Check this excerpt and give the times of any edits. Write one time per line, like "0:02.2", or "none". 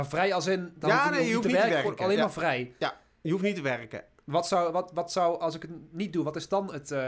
none